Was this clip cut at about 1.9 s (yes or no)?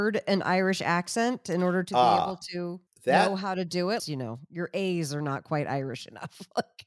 no